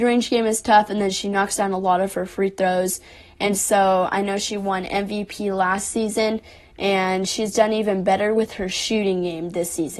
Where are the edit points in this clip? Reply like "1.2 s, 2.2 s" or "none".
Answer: none